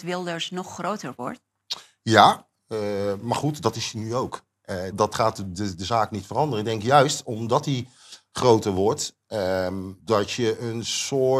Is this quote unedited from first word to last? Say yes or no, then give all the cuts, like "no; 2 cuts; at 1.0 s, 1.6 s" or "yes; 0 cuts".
no; 2 cuts; at 4.9 s, 10.0 s